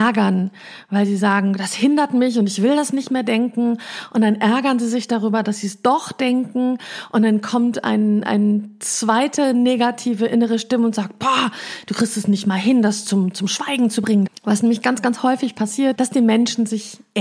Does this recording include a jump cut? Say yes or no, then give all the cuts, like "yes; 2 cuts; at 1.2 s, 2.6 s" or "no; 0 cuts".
yes; 2 cuts; at 14.3 s, 15.9 s